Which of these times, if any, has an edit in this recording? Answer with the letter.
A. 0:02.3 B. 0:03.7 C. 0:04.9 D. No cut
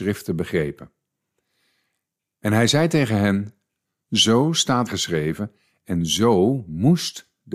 C